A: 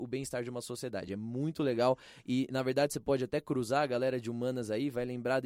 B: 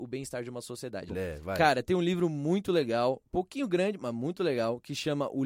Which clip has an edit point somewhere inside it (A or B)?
B